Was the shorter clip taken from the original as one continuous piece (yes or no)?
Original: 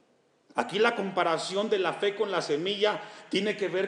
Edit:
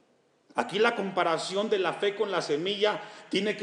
yes